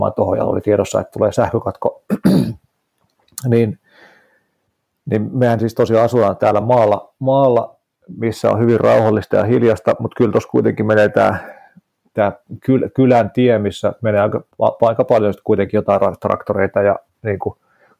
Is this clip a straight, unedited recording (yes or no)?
yes